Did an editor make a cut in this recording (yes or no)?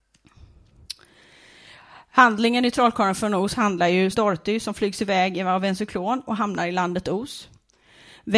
yes